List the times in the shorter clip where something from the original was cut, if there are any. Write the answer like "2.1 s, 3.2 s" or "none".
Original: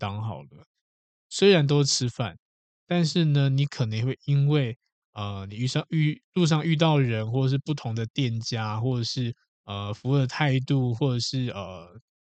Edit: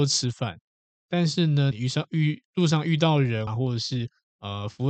1.7 s, 3.5 s